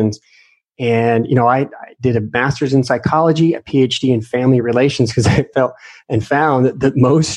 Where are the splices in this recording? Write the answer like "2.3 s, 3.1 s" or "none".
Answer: none